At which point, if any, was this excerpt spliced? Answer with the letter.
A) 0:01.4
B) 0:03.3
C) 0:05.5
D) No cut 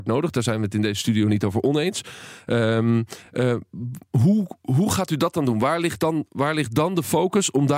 D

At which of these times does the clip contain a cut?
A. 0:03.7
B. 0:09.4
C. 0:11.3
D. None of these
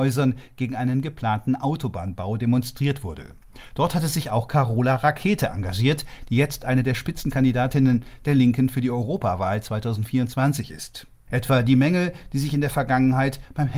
C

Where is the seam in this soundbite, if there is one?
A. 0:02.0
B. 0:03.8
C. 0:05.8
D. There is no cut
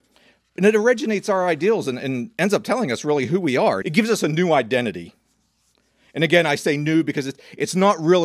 B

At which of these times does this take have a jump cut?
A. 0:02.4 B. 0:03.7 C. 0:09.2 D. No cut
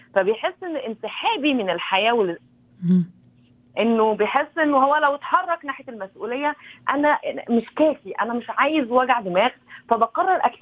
A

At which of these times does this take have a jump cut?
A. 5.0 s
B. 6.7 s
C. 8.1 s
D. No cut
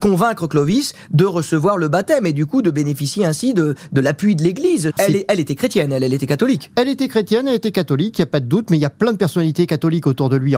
A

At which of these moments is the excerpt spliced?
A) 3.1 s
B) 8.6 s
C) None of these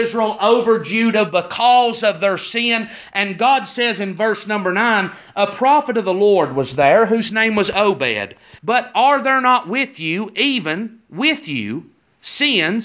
B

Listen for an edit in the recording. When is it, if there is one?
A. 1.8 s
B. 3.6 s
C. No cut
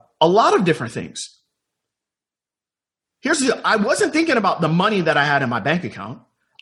C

